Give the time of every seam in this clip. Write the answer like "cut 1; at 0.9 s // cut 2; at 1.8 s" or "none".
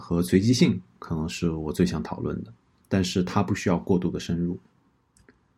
cut 1; at 2.8 s